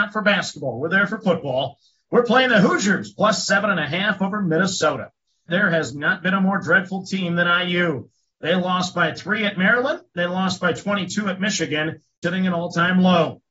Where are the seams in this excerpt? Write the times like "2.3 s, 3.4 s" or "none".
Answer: 5.5 s, 12.2 s